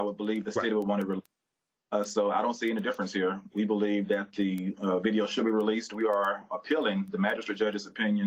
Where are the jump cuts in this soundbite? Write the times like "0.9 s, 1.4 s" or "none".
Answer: none